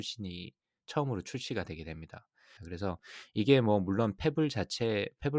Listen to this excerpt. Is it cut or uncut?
cut